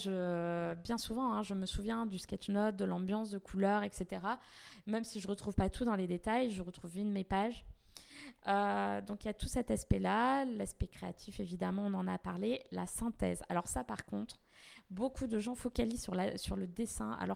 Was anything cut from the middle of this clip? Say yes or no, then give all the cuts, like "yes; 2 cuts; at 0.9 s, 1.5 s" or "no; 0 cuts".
no; 0 cuts